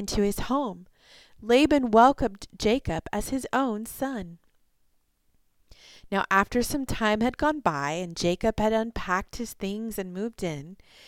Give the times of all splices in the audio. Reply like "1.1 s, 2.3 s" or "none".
none